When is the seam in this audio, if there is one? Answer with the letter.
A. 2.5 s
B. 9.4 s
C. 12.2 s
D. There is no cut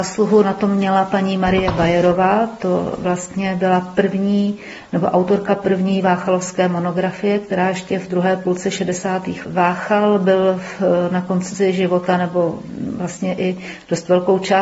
B